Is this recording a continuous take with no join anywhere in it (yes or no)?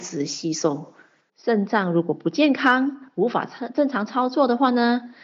no